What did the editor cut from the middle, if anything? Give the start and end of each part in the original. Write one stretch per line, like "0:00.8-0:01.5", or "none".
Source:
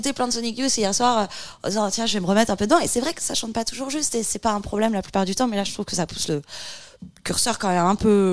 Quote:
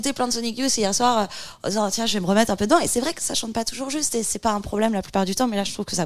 none